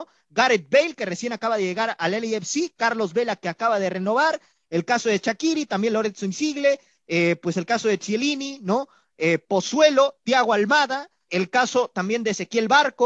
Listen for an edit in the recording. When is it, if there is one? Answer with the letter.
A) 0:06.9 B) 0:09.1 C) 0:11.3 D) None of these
C